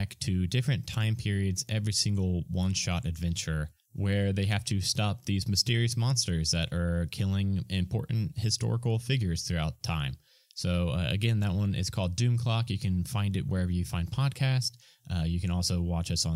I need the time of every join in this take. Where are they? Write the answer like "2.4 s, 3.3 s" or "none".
none